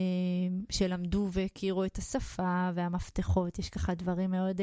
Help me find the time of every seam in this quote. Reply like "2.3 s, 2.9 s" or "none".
none